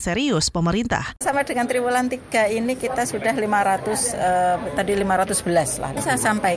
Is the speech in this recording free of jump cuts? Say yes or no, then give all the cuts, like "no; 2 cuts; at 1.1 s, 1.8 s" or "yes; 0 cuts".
no; 1 cut; at 1.2 s